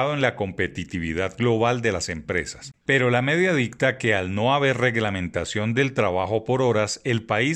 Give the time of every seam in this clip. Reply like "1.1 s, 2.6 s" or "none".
2.8 s